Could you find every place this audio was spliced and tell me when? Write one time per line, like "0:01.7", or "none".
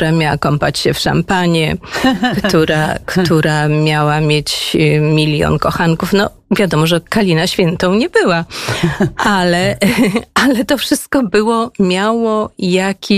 none